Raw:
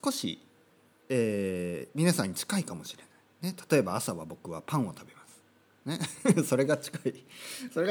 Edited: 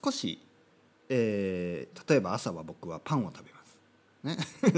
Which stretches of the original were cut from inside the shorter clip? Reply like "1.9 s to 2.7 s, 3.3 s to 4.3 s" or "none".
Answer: 1.9 s to 3.5 s